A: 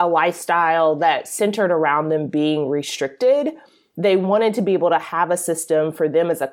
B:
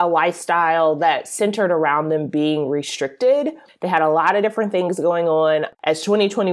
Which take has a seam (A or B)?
B